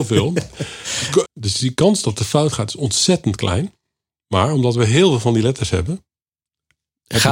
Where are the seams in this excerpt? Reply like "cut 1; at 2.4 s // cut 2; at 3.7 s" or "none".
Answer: cut 1; at 1.2 s